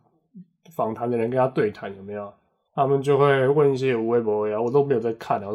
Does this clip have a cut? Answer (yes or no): yes